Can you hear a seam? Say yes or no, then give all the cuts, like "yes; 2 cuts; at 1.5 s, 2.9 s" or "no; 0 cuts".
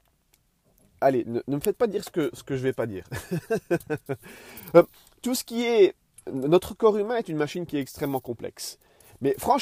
no; 0 cuts